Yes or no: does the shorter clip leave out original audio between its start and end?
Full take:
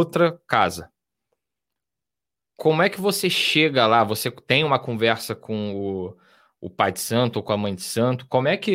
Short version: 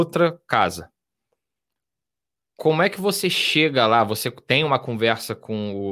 no